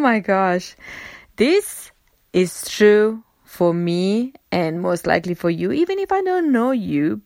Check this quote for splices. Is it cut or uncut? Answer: uncut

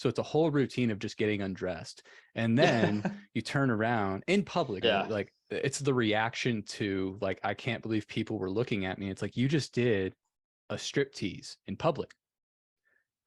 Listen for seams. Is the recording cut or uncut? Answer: cut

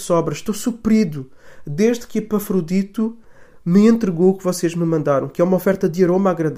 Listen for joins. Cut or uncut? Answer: uncut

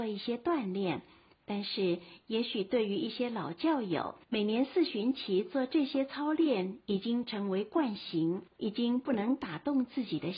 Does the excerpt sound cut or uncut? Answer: cut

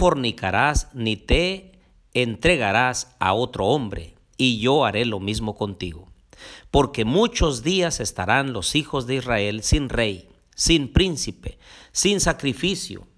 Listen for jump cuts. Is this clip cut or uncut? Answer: uncut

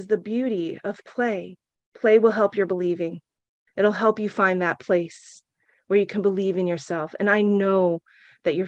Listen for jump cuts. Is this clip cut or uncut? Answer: cut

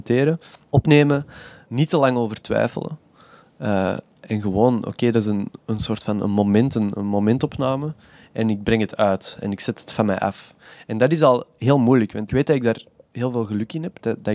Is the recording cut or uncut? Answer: cut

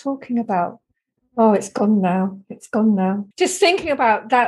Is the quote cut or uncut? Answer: cut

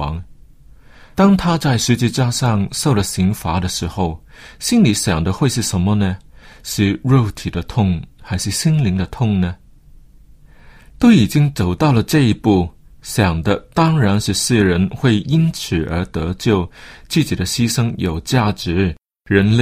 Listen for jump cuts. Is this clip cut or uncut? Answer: cut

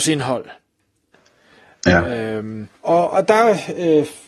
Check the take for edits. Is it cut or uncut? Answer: cut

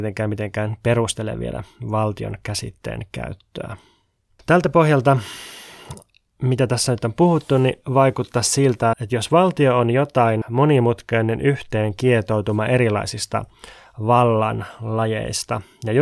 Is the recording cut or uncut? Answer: cut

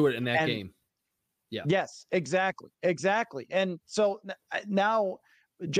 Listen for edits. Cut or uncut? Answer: uncut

